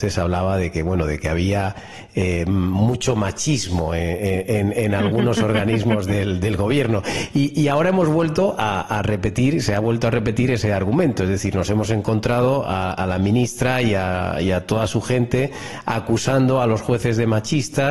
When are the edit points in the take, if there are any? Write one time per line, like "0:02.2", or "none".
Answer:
none